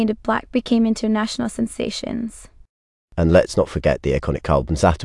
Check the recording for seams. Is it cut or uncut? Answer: uncut